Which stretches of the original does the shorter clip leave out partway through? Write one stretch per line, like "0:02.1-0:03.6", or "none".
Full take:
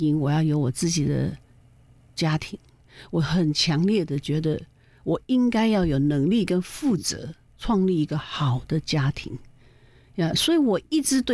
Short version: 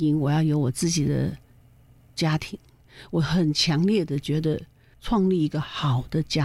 0:04.9-0:07.5